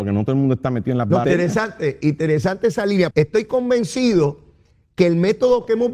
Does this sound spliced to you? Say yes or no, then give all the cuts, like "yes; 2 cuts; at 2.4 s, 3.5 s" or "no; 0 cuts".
yes; 2 cuts; at 1.2 s, 3.1 s